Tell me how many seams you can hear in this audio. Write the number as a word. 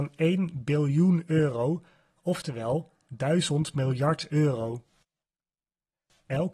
zero